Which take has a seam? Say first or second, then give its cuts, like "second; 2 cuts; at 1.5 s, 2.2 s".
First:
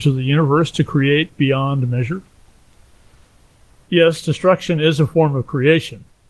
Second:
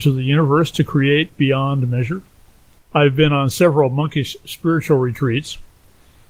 second; 1 cut; at 2.8 s